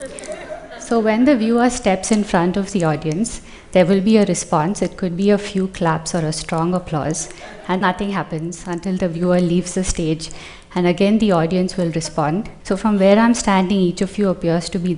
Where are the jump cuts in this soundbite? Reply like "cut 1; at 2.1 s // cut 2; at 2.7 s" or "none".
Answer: cut 1; at 7.8 s // cut 2; at 12.6 s